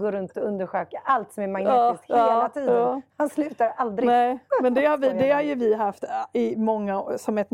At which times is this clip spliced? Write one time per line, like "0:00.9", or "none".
none